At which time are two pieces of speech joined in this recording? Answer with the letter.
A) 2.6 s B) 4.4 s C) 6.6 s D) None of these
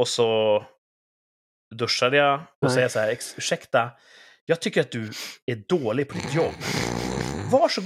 A